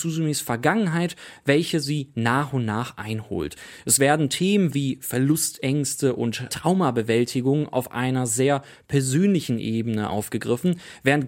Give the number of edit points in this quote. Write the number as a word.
one